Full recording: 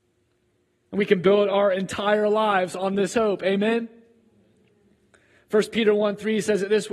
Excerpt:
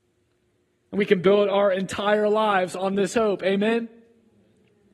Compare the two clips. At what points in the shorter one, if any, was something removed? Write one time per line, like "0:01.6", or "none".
none